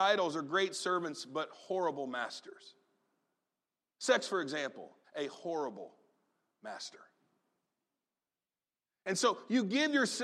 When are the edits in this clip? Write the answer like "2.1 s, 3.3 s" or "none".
5.0 s